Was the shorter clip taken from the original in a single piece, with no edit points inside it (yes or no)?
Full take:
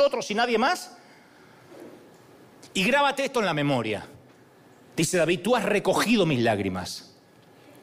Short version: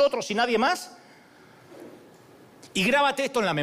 yes